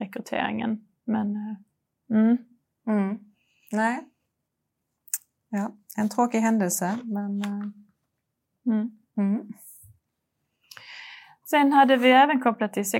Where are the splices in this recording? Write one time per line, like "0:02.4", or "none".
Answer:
none